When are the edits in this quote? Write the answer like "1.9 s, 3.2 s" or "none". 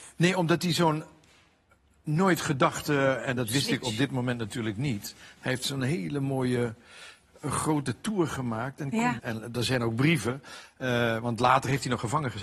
9.2 s